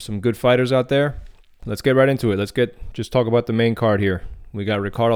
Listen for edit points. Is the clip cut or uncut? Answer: uncut